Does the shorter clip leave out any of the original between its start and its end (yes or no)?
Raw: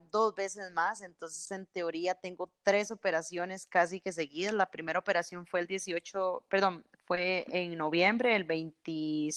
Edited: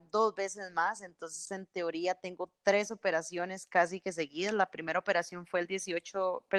no